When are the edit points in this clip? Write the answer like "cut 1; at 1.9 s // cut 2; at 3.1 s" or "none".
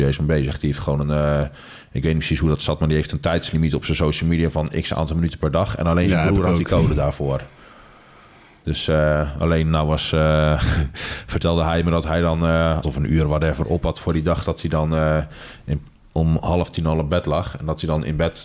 cut 1; at 12.8 s